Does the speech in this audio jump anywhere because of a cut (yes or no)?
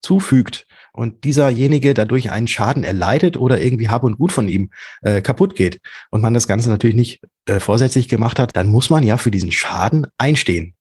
yes